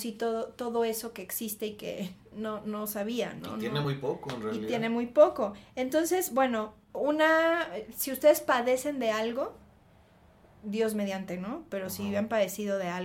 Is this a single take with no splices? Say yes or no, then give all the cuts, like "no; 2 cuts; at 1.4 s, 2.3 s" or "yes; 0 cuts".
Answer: yes; 0 cuts